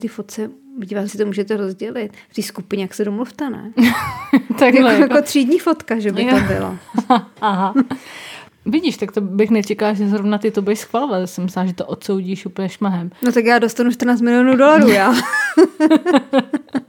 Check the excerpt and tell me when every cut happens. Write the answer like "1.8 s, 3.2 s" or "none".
1.1 s